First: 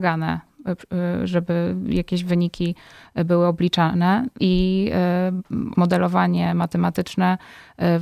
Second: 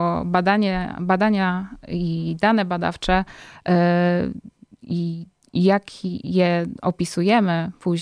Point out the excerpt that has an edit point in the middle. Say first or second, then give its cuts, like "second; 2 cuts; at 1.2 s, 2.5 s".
first; 2 cuts; at 4.4 s, 5.7 s